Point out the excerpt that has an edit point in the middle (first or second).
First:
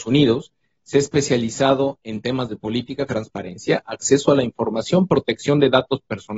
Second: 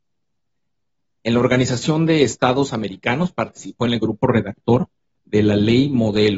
first